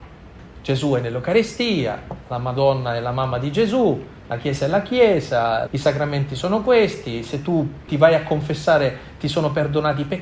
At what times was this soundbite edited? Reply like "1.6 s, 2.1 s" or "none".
5.7 s, 7.9 s